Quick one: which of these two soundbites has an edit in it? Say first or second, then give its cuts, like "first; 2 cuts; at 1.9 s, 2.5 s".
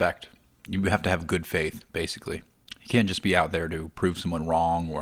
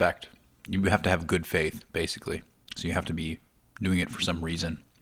second; 1 cut; at 2.8 s